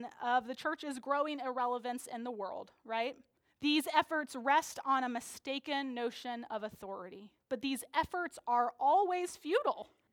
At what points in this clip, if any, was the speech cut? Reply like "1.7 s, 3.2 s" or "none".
7.5 s